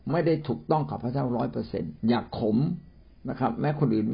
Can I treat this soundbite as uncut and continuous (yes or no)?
no